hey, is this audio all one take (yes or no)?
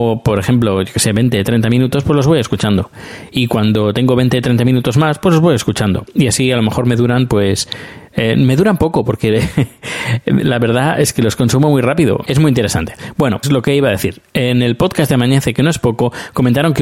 no